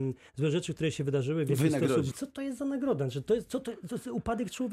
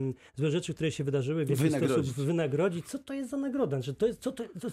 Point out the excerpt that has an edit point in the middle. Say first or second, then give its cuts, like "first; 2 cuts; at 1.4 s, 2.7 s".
first; 1 cut; at 2.1 s